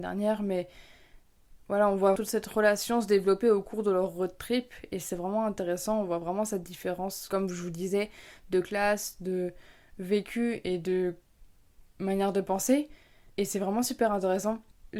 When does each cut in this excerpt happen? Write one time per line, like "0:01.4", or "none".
0:02.2

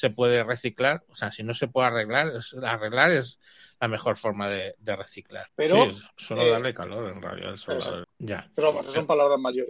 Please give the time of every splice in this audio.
0:05.5
0:08.0

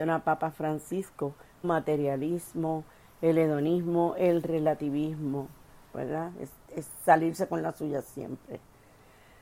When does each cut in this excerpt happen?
0:01.6
0:05.9

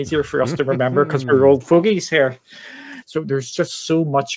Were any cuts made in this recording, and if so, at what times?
0:03.0

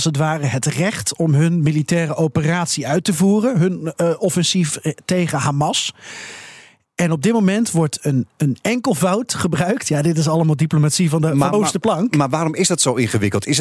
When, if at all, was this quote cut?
0:11.5

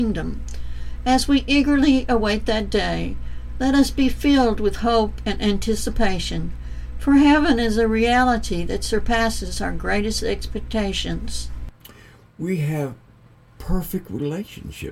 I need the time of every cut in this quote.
none

